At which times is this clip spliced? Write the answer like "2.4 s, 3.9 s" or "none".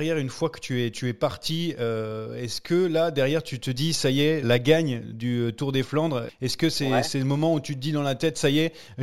4.4 s